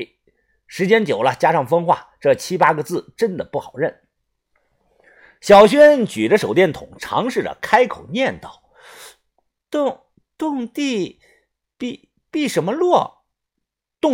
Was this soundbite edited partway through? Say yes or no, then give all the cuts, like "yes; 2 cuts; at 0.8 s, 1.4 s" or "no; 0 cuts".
no; 0 cuts